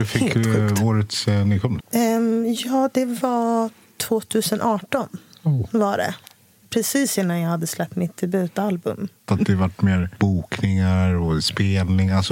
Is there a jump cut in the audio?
yes; 2 cuts; at 1.8 s, 9.3 s

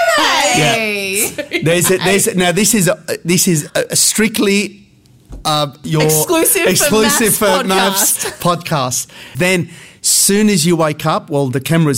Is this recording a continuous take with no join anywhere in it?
no; 2 cuts; at 3.7 s, 9.3 s

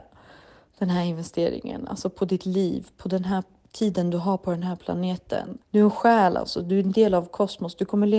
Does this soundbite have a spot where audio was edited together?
yes; 1 cut; at 5.6 s

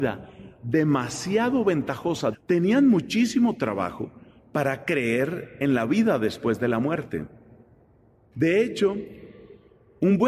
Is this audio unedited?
no; 2 cuts; at 2.3 s, 8.3 s

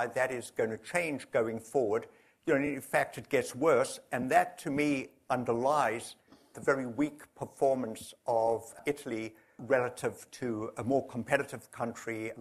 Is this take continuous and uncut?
yes; 0 cuts

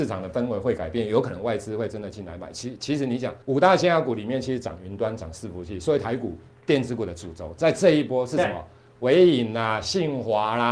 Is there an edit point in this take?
yes; 1 cut; at 3.4 s

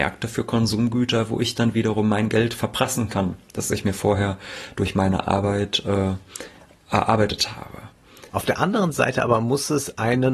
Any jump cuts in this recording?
yes; 1 cut; at 8.3 s

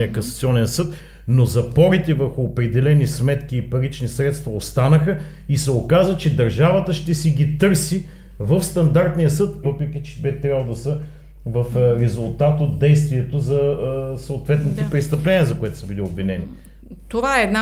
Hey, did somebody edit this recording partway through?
yes; 1 cut; at 9.6 s

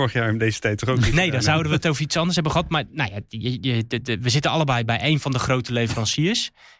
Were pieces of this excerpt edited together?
no; 0 cuts

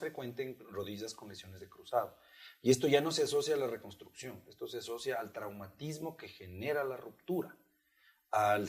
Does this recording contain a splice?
no; 0 cuts

